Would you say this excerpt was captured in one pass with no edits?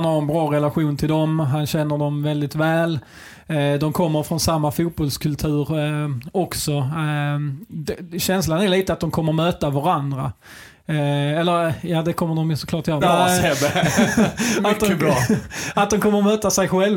no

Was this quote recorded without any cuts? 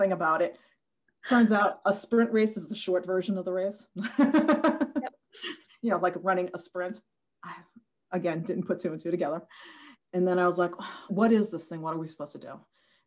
no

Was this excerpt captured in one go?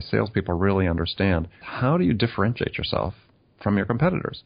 no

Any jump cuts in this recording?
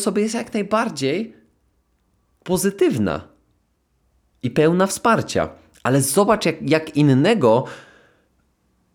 no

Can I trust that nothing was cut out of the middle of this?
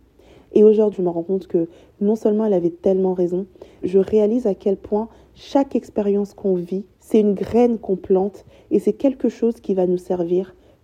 no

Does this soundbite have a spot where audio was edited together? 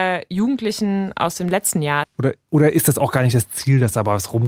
yes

